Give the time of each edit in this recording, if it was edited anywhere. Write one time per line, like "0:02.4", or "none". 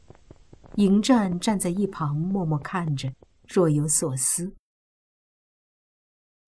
none